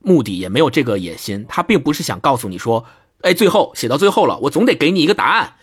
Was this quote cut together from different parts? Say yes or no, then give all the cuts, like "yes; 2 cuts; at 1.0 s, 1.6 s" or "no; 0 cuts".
no; 0 cuts